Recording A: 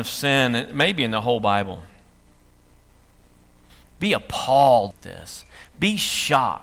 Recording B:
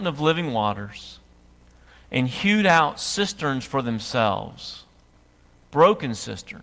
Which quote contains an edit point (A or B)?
A